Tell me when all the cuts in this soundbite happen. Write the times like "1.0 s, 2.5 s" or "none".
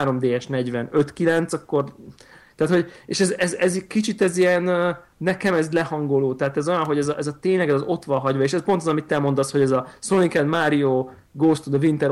none

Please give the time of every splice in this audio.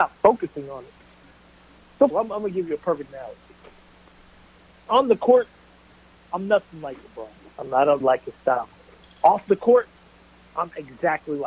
2.1 s, 8.0 s

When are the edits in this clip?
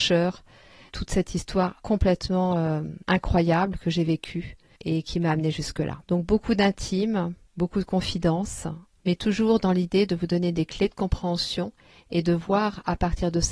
6.0 s

